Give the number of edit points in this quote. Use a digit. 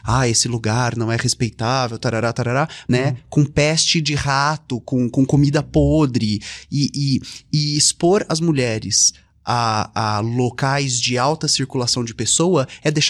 1